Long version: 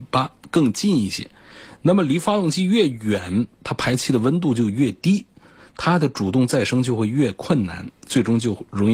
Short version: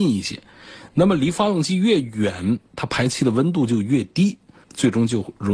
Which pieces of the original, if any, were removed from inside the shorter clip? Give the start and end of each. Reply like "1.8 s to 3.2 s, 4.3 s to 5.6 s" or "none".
5.5 s to 8.0 s